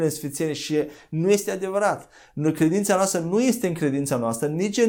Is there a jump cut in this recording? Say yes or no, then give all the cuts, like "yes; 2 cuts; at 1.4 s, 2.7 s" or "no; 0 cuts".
no; 0 cuts